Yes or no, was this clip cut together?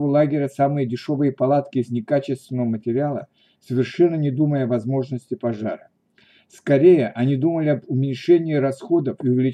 no